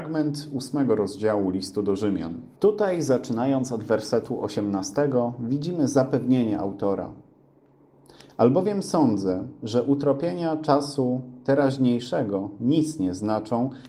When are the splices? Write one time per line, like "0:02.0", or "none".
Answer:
0:02.6